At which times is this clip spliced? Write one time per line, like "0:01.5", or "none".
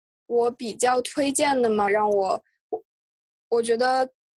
0:01.9